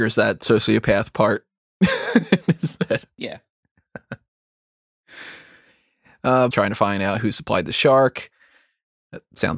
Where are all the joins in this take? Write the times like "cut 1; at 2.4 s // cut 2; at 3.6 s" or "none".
cut 1; at 6.5 s